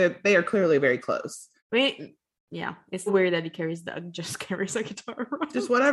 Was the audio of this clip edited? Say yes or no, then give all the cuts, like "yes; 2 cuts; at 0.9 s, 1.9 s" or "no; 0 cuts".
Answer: yes; 2 cuts; at 1.6 s, 3.1 s